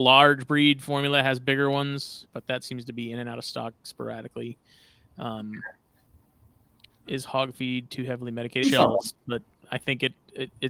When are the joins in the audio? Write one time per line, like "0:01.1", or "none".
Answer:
0:02.2
0:08.6